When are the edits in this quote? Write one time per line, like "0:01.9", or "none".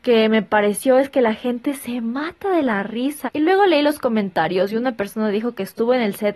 0:03.3